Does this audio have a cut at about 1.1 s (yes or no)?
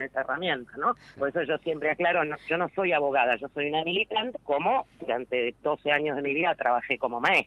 yes